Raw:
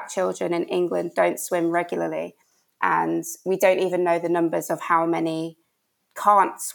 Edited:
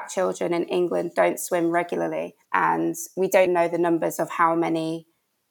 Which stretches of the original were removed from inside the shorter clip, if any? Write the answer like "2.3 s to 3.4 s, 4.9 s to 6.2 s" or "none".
2.4 s to 2.7 s, 3.7 s to 4.0 s